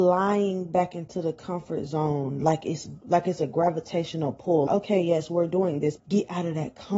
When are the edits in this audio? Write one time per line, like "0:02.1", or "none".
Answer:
0:04.7
0:06.0